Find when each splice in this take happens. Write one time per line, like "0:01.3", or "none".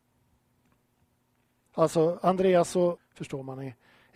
0:01.7
0:03.0